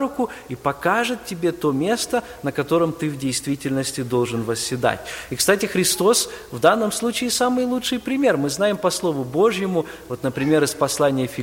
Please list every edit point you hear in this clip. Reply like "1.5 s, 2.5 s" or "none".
none